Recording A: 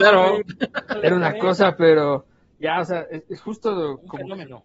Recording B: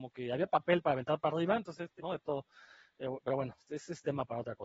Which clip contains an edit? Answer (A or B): B